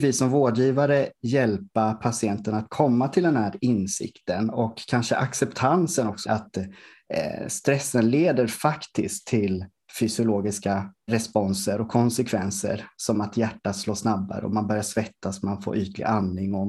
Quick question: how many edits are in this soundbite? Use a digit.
2